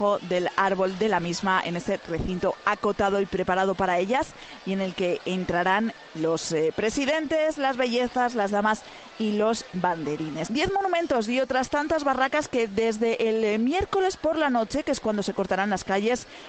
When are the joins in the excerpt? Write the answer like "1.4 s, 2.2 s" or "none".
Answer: 10.5 s

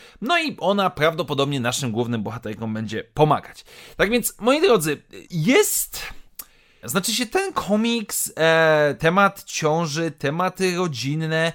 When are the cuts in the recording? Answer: 5.2 s, 6.8 s, 9.0 s

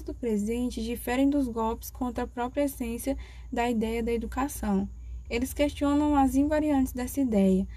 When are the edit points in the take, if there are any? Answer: 5.3 s

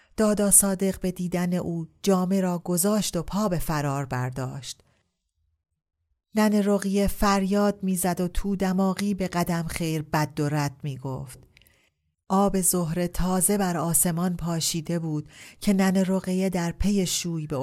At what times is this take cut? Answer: 12.1 s

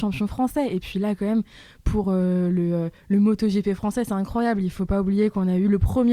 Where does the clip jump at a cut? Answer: none

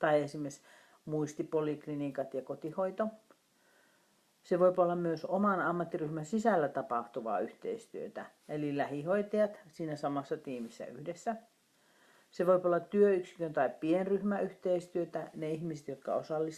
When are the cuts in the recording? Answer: none

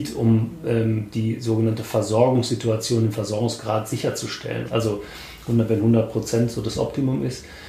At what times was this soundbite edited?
4.6 s

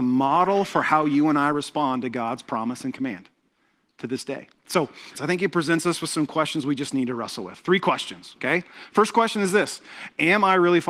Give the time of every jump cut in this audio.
5.1 s

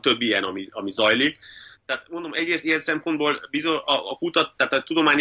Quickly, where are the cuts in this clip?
1.7 s

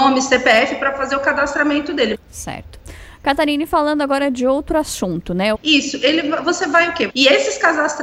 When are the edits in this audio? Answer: 2.1 s, 5.5 s, 7.1 s

